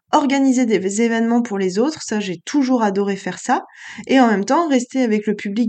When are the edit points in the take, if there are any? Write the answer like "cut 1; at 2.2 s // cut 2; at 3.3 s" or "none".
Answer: none